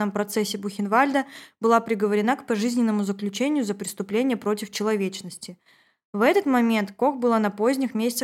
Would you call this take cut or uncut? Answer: uncut